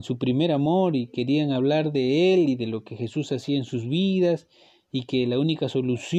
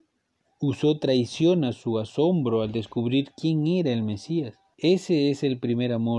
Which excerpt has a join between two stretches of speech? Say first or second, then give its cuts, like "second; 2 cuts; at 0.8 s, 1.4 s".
second; 1 cut; at 4.7 s